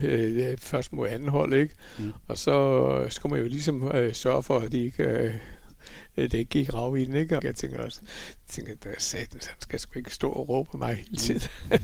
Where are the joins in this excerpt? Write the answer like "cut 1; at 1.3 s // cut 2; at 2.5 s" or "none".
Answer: cut 1; at 7.4 s